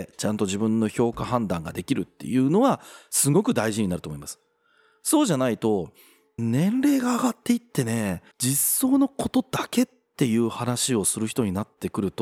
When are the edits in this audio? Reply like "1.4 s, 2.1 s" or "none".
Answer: 6.4 s, 8.3 s